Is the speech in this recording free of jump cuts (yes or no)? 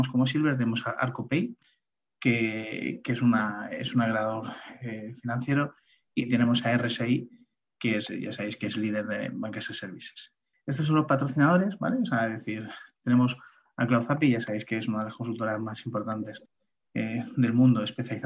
no